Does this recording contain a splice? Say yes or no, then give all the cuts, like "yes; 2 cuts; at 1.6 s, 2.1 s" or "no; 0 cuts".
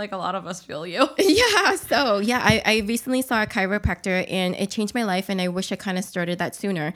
no; 0 cuts